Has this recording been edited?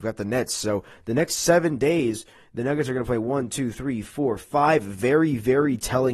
no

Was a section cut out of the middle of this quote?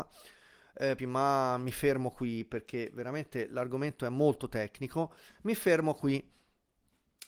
yes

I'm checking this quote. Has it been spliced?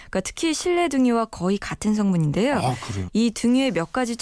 yes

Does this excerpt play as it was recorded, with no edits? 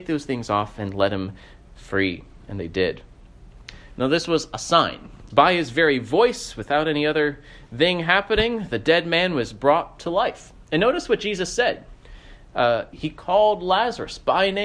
no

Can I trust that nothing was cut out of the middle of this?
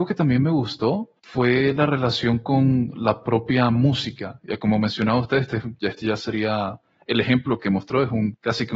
yes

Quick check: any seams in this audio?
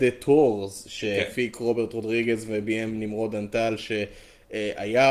no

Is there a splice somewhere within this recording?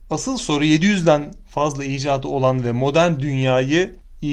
no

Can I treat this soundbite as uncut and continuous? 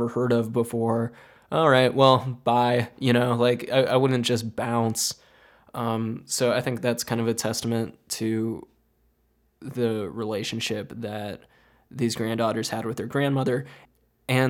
yes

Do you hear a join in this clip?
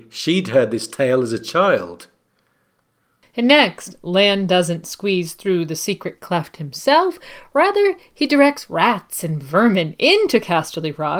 no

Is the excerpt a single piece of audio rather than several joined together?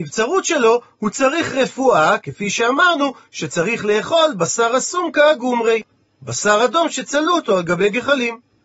yes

